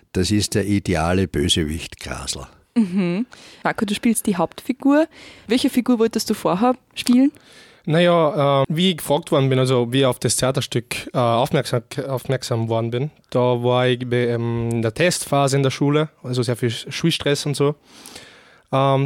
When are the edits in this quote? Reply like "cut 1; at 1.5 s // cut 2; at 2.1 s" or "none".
cut 1; at 8.6 s